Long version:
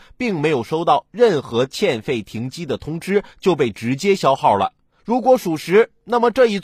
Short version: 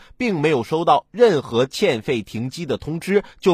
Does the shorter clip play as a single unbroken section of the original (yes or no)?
yes